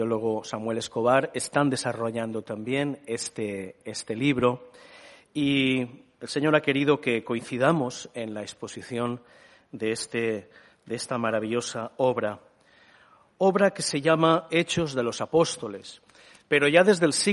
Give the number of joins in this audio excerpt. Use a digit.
0